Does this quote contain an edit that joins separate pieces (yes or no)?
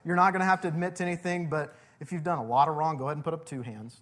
no